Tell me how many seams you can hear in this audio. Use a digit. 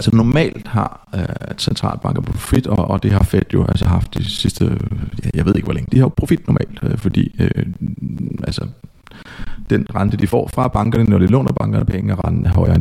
1